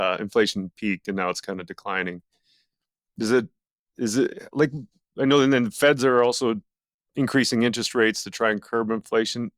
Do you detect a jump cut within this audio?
no; 0 cuts

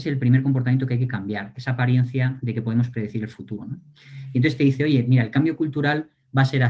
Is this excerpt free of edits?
no; 1 cut; at 3.6 s

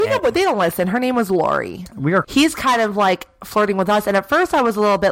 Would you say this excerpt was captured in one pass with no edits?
no; 1 cut; at 2.2 s

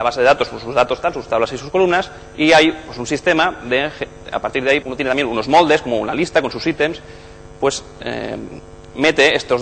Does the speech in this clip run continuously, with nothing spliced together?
no; 1 cut; at 4.8 s

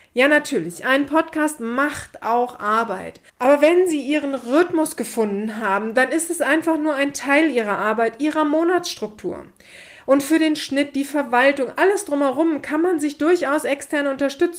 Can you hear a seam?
yes; 1 cut; at 3.3 s

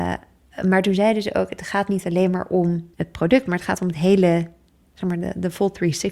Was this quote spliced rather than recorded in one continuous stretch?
yes; 1 cut; at 2.9 s

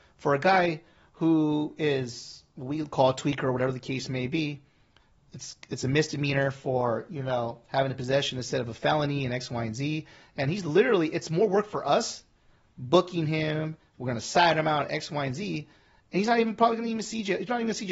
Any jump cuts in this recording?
no; 0 cuts

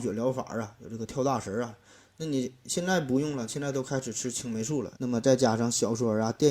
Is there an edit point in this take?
yes; 1 cut; at 5.0 s

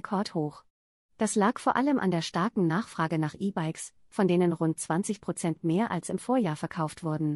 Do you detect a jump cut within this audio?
no; 0 cuts

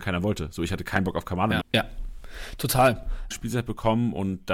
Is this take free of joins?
no; 2 cuts; at 1.6 s, 3.3 s

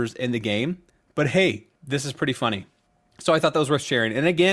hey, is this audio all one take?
no; 1 cut; at 1.8 s

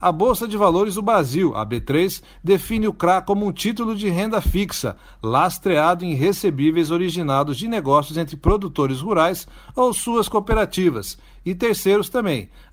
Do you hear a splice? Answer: no; 0 cuts

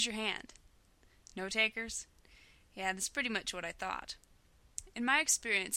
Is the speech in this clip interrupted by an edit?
no; 0 cuts

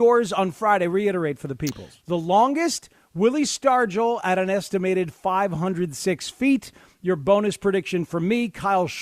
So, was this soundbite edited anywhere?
yes; 1 cut; at 2.0 s

